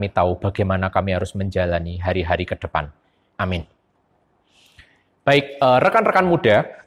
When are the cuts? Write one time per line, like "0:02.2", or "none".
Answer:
0:03.3